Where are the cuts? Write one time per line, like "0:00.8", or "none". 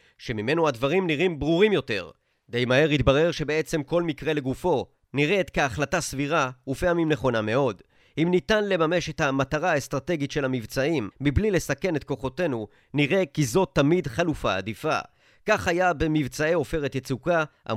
0:05.0
0:11.1